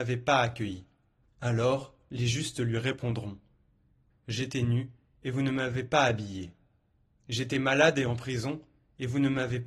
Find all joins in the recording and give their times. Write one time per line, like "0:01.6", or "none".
0:01.2
0:04.1